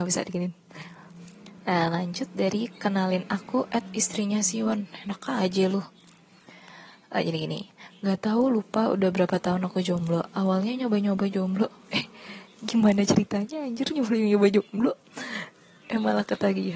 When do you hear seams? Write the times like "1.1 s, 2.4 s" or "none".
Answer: none